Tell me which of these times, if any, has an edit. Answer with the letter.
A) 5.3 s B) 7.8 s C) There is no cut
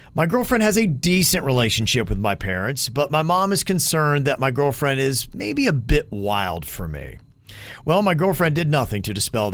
C